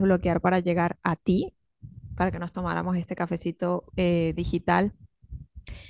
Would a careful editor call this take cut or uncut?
cut